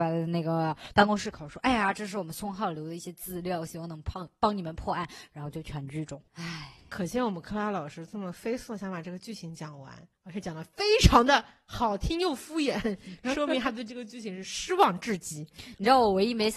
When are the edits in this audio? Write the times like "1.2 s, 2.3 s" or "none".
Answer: 6.3 s